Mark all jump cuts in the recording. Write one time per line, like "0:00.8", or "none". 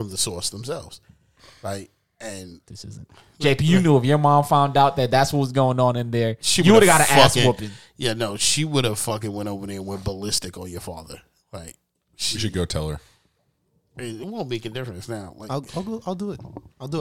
0:02.7